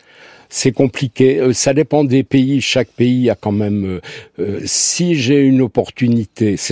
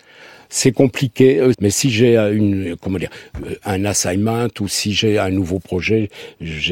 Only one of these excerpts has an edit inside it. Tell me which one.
second; 1 cut; at 1.5 s

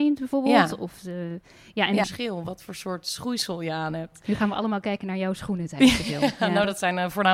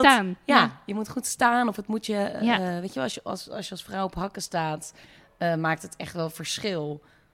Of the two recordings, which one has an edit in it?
first; 1 cut; at 2.0 s

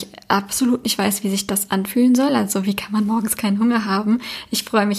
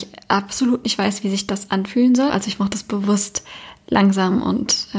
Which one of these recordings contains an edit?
second; 1 cut; at 2.3 s

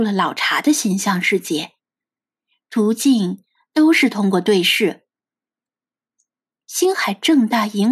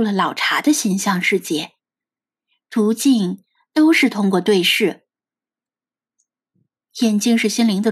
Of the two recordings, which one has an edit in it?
first; 1 cut; at 6.5 s

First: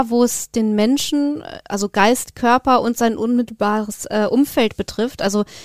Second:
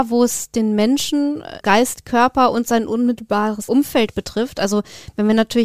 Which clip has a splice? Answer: second; 2 cuts; at 1.6 s, 3.7 s

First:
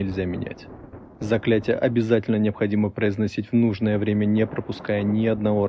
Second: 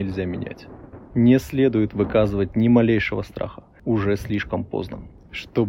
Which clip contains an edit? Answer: second; 1 cut; at 1.1 s

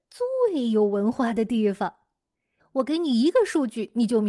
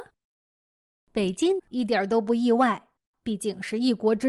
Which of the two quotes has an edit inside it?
second; 1 cut; at 1.6 s

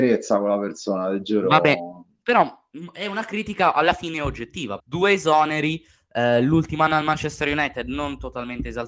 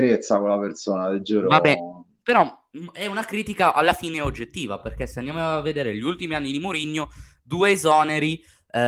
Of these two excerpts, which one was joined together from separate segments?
first; 1 cut; at 4.8 s

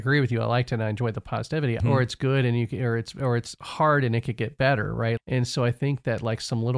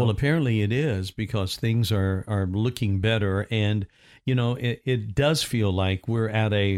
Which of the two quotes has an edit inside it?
first; 2 cuts; at 1.8 s, 5.2 s

